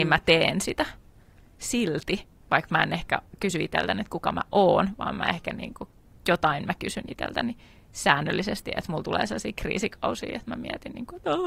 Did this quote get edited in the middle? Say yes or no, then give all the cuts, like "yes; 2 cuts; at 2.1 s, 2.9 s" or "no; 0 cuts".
no; 0 cuts